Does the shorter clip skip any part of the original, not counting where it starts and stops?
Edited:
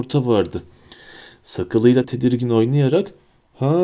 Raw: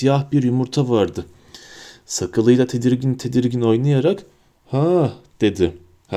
yes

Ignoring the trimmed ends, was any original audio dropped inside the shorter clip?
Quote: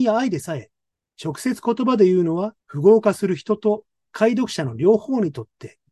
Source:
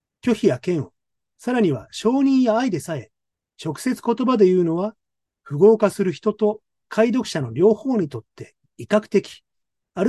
yes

